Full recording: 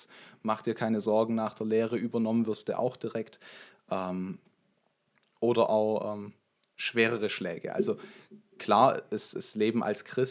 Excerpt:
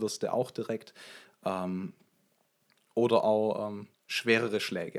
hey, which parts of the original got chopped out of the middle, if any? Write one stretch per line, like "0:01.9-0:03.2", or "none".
0:06.4-0:06.6